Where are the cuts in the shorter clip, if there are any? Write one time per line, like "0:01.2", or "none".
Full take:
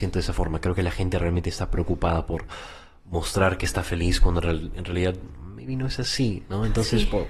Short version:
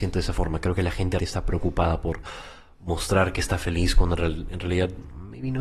0:01.2